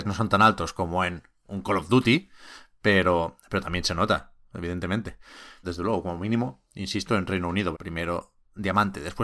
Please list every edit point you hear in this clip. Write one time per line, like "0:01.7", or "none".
0:05.6
0:07.7